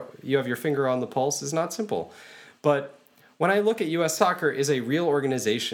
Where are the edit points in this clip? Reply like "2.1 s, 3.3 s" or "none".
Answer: 4.2 s